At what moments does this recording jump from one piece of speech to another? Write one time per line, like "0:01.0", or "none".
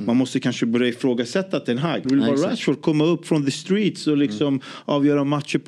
0:02.0